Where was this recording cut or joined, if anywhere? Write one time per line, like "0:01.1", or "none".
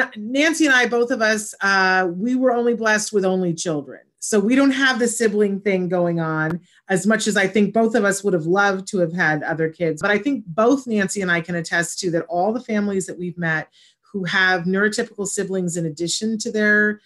0:10.0